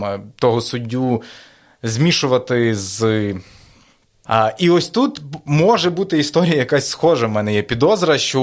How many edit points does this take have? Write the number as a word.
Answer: one